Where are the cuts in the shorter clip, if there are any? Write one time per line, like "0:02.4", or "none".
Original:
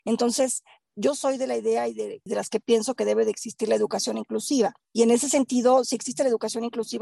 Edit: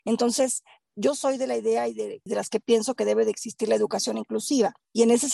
none